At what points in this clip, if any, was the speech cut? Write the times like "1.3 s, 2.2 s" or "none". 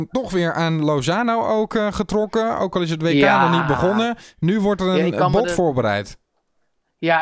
none